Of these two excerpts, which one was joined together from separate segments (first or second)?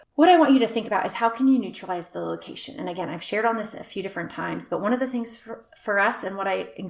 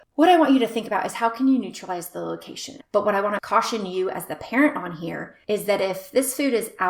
second